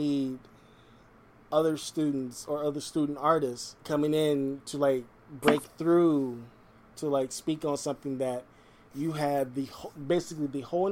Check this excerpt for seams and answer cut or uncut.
cut